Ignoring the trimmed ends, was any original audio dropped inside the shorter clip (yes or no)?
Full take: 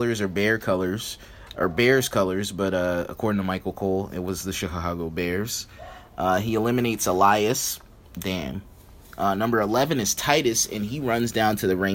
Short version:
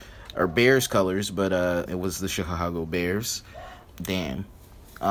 yes